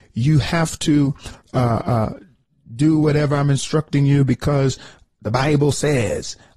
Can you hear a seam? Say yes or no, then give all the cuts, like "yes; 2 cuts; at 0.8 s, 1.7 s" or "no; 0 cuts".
no; 0 cuts